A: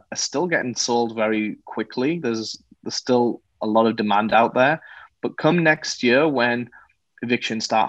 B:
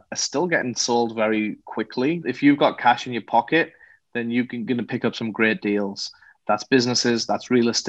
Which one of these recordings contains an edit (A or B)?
B